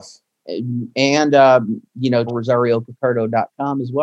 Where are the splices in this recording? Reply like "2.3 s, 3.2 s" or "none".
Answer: 2.3 s